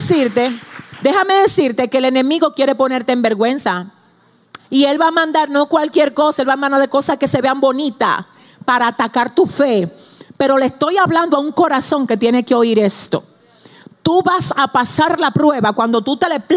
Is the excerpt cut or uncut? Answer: uncut